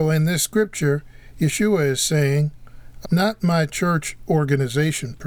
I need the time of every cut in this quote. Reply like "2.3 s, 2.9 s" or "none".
3.0 s